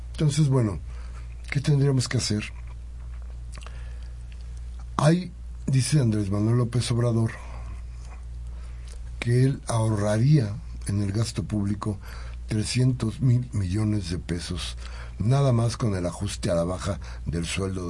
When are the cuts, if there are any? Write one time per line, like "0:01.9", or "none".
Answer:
none